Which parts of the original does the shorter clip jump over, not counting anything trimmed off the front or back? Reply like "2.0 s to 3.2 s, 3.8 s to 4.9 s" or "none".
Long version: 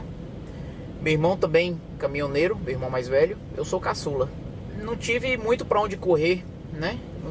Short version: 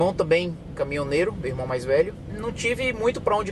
3.5 s to 4.7 s